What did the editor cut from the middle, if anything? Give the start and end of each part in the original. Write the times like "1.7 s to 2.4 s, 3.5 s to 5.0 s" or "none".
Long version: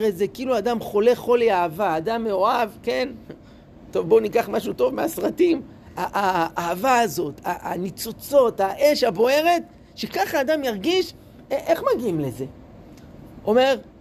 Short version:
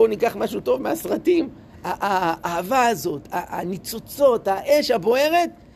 none